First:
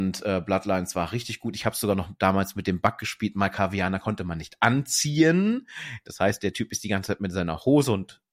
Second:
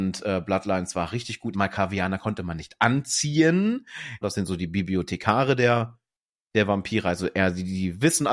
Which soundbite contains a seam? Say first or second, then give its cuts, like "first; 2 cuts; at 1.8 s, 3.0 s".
second; 2 cuts; at 1.5 s, 4.2 s